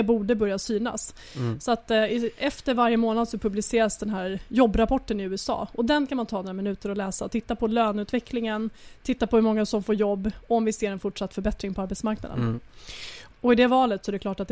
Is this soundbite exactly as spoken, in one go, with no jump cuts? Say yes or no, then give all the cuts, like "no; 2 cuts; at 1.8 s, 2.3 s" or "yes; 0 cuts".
no; 1 cut; at 13.3 s